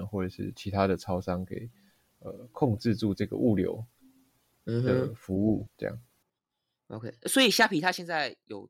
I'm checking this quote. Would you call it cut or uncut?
cut